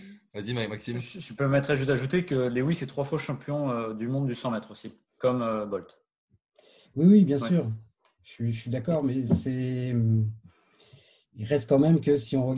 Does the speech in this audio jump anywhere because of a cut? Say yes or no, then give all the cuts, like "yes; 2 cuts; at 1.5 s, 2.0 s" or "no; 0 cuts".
no; 0 cuts